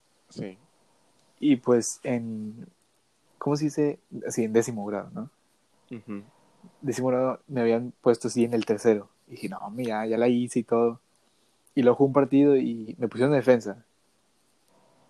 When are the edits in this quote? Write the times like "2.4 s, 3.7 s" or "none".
none